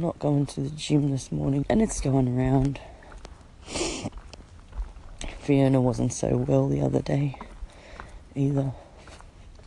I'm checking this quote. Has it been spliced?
yes; 1 cut; at 1.6 s

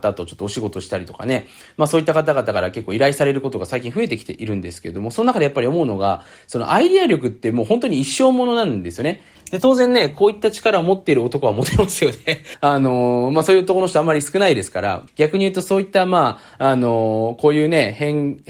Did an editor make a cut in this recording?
yes; 3 cuts; at 9.3 s, 12.5 s, 15.1 s

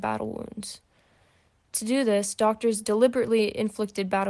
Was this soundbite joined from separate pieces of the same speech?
no; 0 cuts

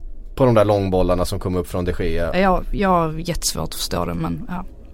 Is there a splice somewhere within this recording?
yes; 1 cut; at 2.3 s

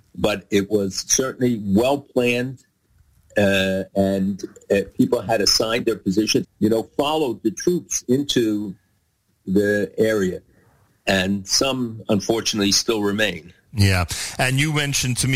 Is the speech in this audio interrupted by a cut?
yes; 1 cut; at 6.4 s

